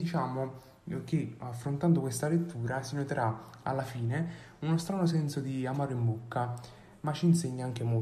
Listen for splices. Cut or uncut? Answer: uncut